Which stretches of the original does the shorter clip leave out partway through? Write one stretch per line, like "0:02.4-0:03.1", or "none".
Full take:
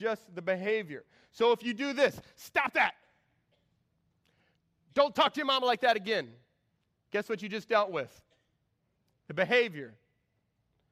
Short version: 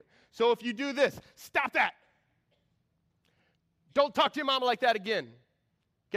none